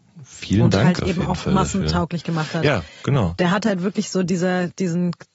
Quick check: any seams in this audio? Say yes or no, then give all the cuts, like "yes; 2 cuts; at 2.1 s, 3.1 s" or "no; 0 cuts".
no; 0 cuts